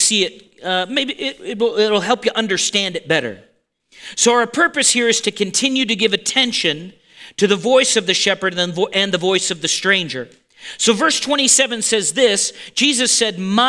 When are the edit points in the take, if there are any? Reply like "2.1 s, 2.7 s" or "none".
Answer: none